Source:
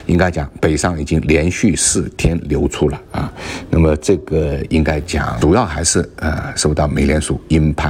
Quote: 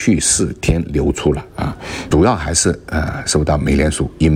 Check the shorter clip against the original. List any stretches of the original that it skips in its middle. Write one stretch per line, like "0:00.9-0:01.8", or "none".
0:03.7-0:05.4

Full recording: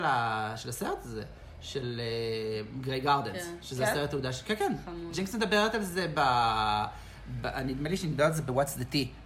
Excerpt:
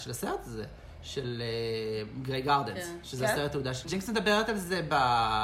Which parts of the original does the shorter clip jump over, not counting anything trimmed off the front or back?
0:04.4-0:05.1

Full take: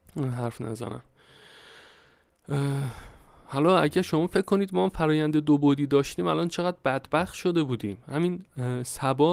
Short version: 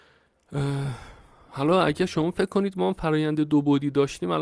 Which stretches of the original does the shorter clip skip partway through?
none

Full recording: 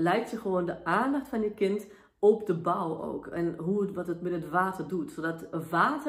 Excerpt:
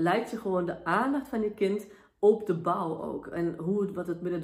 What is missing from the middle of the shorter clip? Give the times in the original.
none

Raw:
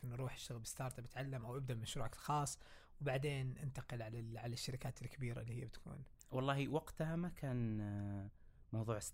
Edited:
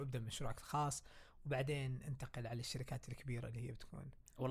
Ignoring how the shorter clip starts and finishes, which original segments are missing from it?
0:04.0-0:04.4

